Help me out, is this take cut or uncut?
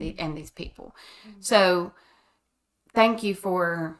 uncut